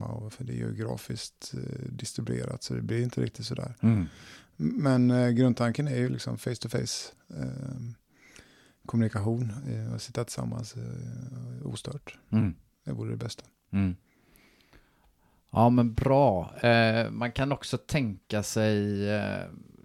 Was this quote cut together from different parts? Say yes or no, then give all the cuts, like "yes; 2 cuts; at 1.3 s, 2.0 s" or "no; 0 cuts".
no; 0 cuts